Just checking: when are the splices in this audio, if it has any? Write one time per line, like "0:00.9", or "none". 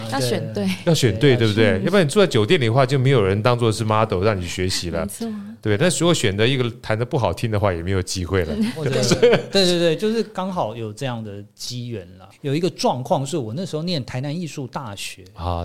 0:12.3

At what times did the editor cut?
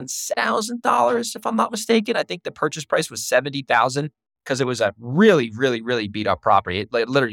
none

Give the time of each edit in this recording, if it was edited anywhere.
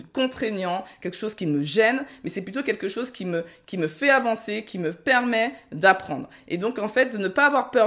none

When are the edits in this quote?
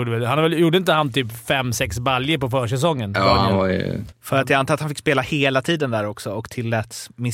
0:04.1

